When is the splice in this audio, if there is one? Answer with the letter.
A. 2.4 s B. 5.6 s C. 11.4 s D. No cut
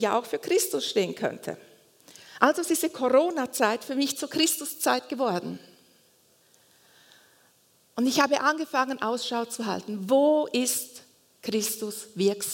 D